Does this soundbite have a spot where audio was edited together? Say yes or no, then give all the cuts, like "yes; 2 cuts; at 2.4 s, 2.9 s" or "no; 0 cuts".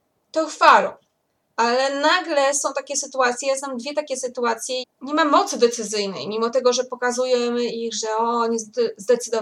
yes; 1 cut; at 4.8 s